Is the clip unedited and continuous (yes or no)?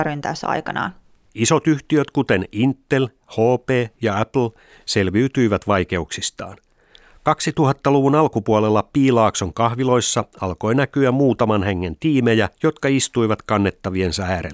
no